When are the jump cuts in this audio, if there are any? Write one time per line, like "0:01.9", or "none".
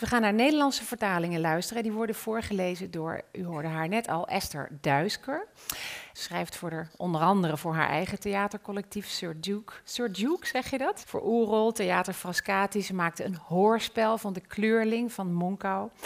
0:06.2
0:11.0